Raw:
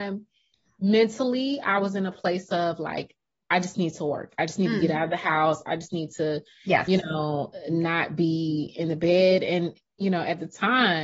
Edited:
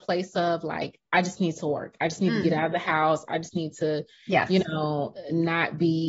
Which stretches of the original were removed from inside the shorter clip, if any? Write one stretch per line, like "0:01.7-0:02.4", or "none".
0:03.2-0:03.4